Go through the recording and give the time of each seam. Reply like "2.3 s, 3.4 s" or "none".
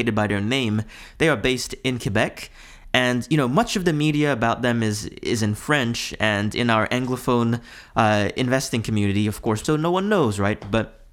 9.6 s